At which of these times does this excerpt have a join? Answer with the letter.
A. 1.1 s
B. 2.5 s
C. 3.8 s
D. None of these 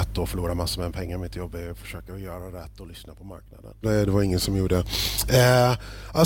C